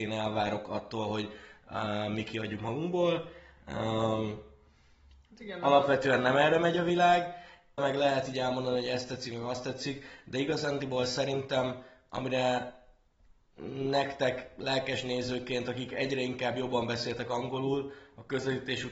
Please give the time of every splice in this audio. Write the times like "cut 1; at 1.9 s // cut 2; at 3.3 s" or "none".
cut 1; at 7.8 s